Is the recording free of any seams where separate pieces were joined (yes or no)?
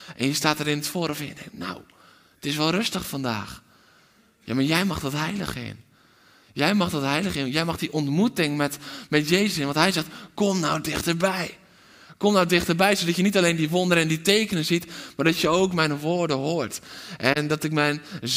yes